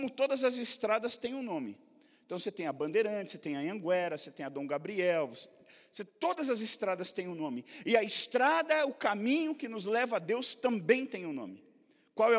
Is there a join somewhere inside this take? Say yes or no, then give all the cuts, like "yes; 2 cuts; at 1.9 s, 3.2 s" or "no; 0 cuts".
no; 0 cuts